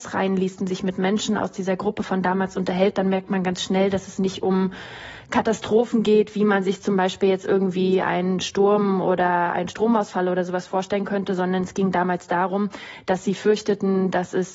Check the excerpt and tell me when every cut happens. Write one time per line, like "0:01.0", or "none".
none